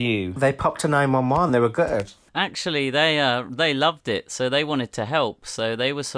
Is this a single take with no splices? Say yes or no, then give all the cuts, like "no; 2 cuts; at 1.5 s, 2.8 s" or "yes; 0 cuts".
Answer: yes; 0 cuts